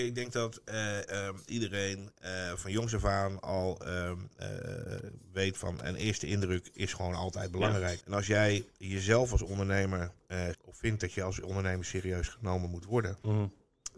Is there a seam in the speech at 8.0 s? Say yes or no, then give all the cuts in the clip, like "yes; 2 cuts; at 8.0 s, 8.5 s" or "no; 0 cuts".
yes; 2 cuts; at 8.0 s, 10.5 s